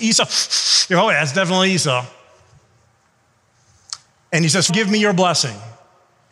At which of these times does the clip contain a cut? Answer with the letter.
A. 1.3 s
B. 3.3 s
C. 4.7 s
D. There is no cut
C